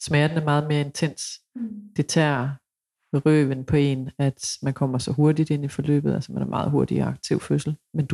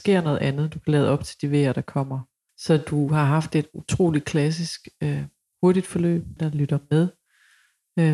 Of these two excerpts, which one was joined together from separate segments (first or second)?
second